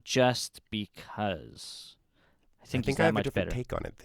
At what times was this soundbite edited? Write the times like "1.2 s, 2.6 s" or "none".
none